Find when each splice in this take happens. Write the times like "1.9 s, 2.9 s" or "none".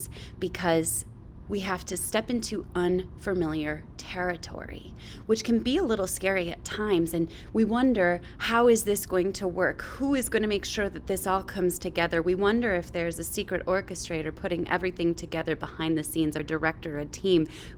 1.4 s, 16.4 s